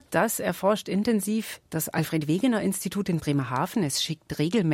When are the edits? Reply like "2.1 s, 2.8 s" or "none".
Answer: none